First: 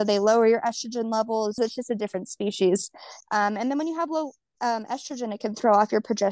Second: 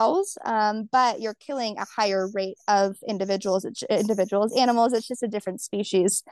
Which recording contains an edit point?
first; 2 cuts; at 1.6 s, 3.2 s

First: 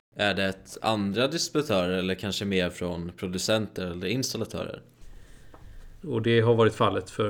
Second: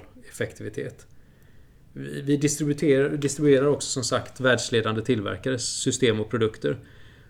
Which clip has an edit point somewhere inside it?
first; 1 cut; at 6.0 s

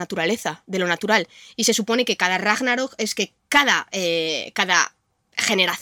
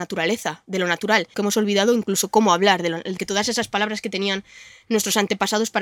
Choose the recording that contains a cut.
second; 2 cuts; at 1.3 s, 3.2 s

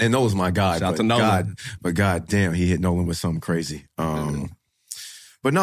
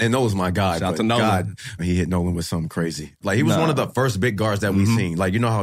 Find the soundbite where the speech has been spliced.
second; 2 cuts; at 1.8 s, 3.2 s

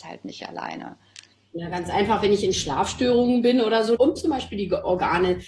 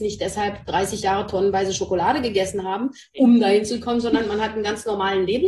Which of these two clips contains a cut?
first; 1 cut; at 4.0 s

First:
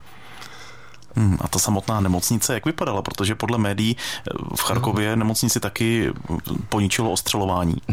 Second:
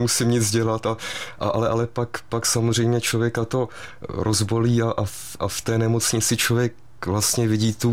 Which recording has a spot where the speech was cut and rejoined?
first; 1 cut; at 1.1 s

